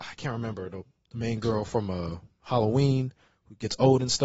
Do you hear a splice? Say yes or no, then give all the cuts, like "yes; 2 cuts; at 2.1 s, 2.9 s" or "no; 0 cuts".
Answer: no; 0 cuts